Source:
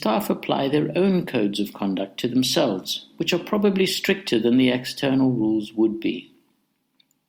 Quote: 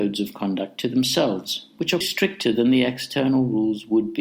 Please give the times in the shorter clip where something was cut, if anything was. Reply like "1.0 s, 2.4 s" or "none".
2.0 s